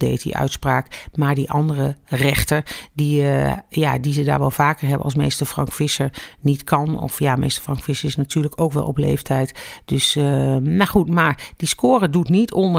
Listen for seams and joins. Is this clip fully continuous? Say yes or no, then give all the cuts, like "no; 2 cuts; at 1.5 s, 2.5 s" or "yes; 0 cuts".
yes; 0 cuts